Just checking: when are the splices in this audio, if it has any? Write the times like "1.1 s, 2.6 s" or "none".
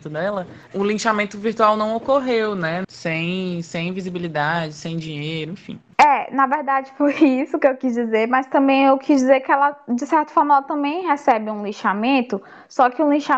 2.8 s